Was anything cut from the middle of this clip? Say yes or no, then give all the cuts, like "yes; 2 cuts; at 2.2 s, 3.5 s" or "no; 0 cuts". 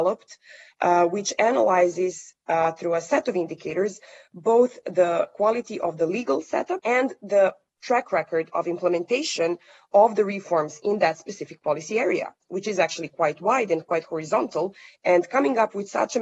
yes; 1 cut; at 6.8 s